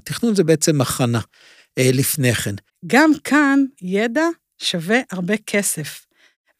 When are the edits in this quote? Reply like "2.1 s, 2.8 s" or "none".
2.7 s, 3.7 s